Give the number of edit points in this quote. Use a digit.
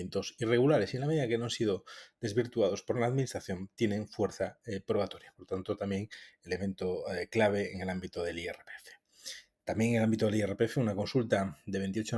0